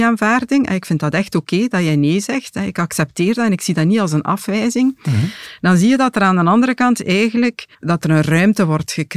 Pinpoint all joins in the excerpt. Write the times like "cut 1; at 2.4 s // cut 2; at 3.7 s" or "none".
cut 1; at 7.7 s